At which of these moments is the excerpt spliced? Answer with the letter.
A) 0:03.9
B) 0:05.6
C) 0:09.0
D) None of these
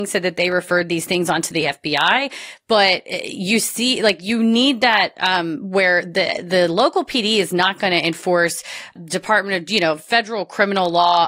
C